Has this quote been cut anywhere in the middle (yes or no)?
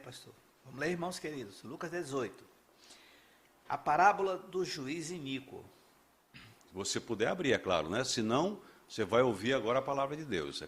yes